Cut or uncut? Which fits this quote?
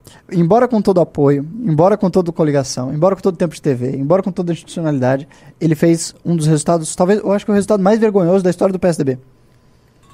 uncut